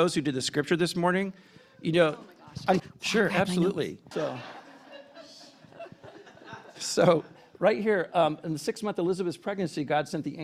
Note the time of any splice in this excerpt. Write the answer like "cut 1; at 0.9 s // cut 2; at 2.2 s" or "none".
cut 1; at 2.8 s // cut 2; at 4.1 s